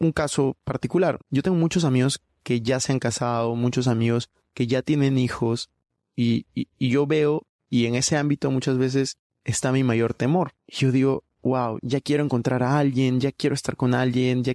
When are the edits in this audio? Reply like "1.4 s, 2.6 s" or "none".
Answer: 1.2 s, 10.6 s, 11.8 s